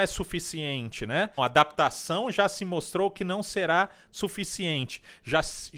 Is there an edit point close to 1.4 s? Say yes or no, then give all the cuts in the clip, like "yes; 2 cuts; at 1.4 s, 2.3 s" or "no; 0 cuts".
yes; 1 cut; at 1.4 s